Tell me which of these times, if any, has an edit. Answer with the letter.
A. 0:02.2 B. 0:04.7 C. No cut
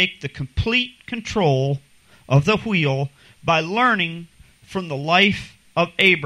C